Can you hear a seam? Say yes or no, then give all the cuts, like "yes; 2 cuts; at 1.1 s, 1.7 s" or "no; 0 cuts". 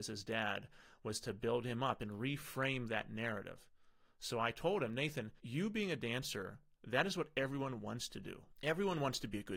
yes; 1 cut; at 5.4 s